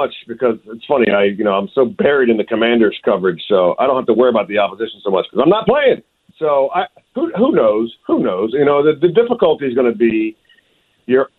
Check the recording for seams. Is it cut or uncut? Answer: cut